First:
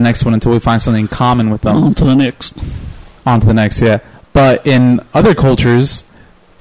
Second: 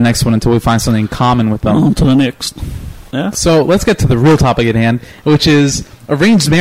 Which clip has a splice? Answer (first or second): second